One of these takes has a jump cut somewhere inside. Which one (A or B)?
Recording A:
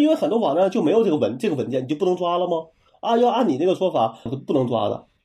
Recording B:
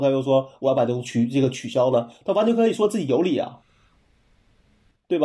A